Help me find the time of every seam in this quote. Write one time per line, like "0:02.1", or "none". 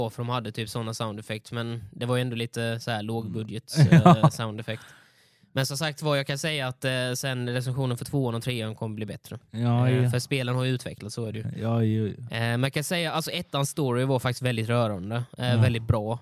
none